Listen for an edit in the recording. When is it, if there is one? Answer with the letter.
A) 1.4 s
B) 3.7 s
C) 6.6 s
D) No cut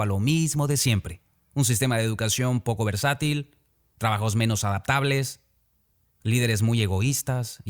D